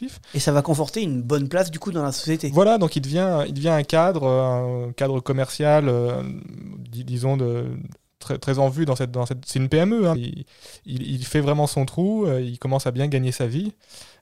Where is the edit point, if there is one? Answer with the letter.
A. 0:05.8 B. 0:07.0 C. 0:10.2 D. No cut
C